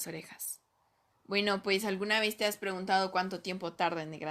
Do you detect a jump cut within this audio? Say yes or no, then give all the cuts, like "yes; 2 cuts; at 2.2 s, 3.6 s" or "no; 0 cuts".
yes; 1 cut; at 1.1 s